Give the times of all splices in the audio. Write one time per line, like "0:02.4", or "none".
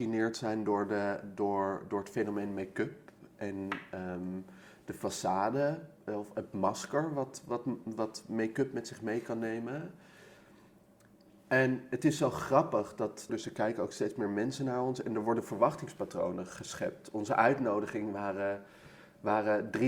0:13.3